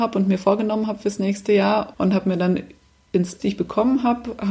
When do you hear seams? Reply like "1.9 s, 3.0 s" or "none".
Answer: 1.9 s, 3.4 s